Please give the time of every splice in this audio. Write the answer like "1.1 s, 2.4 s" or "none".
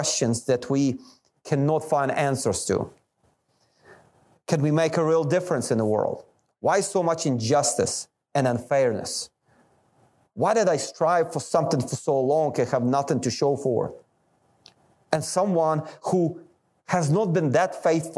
none